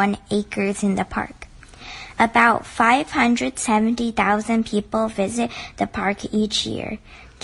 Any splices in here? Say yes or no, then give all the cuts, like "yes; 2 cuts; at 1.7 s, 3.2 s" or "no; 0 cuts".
no; 0 cuts